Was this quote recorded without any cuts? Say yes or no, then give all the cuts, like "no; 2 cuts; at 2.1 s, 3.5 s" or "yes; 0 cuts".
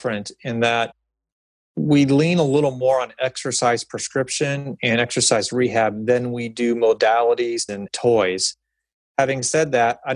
no; 1 cut; at 7.7 s